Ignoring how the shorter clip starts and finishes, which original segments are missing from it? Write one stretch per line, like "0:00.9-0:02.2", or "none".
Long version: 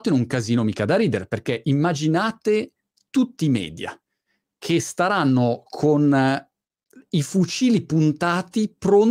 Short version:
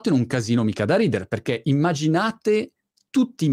none